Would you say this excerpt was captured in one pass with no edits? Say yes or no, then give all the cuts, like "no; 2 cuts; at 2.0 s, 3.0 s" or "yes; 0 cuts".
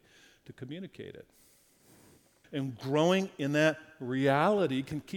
no; 1 cut; at 2.4 s